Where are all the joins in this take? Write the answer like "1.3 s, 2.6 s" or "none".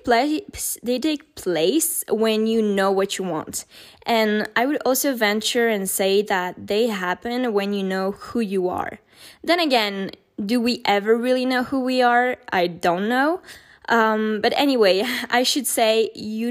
none